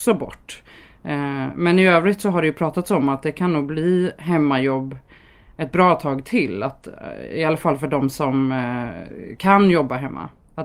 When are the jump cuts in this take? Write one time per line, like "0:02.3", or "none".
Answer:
none